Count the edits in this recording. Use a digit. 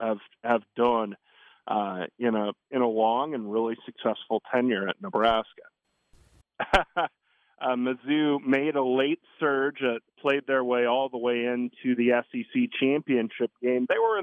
2